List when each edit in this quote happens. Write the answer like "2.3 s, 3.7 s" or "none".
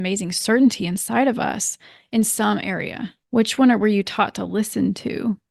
3.2 s